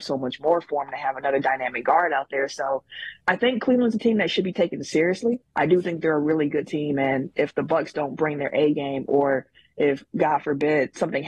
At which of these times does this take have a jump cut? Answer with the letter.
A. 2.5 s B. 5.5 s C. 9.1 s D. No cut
B